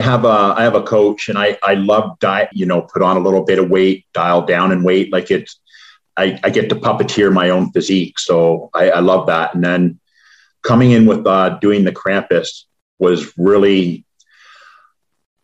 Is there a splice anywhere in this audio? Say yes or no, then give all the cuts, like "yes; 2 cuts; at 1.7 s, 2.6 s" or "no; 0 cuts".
yes; 1 cut; at 2.5 s